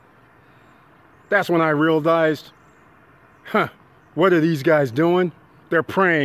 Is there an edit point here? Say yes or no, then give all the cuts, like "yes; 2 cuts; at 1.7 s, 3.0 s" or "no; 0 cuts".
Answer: no; 0 cuts